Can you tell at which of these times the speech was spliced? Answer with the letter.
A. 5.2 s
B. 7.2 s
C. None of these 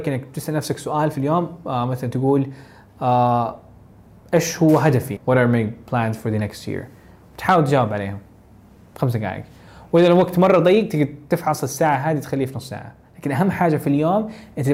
A